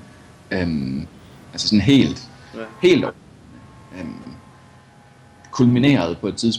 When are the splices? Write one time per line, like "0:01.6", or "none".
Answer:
none